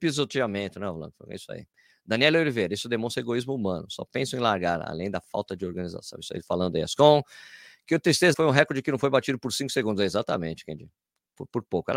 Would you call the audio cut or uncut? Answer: cut